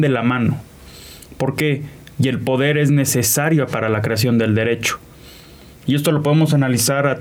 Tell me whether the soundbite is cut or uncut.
cut